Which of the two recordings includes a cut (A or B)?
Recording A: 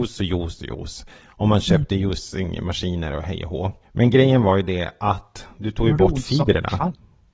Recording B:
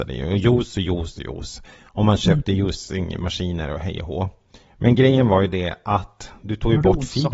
A